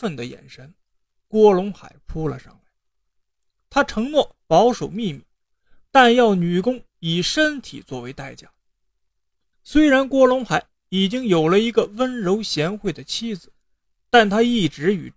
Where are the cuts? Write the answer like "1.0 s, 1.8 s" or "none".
9.5 s